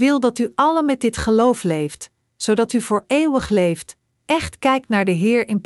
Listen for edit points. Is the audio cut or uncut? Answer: uncut